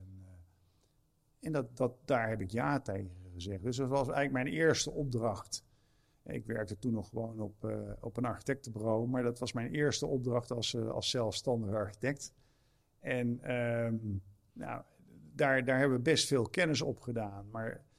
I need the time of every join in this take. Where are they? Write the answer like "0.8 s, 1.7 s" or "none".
none